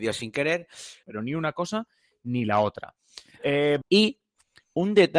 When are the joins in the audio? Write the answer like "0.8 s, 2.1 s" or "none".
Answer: 1.0 s, 3.8 s